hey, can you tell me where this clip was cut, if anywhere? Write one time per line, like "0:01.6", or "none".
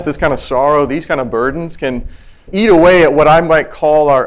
0:02.5